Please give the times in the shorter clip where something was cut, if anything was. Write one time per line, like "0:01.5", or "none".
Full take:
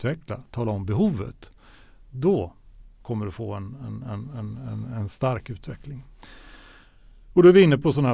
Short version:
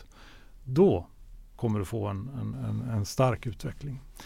0:02.5